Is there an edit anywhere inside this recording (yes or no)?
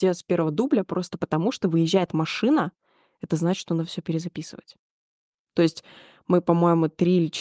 yes